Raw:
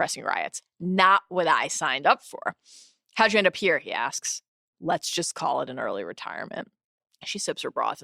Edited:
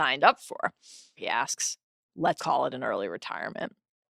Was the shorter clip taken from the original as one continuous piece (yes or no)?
no